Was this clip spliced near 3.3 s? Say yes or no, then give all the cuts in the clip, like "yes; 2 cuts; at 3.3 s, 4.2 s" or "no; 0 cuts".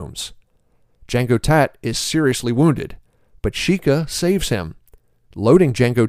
no; 0 cuts